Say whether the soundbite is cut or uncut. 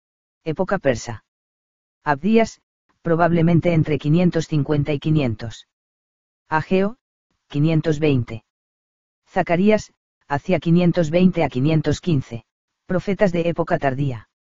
cut